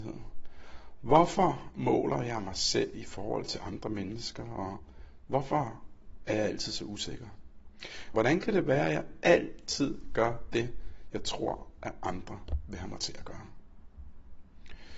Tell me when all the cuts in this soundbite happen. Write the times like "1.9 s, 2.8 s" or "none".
8.1 s